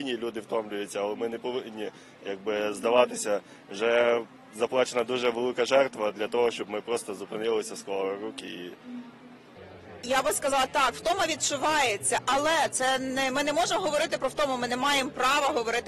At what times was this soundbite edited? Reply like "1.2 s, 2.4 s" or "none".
none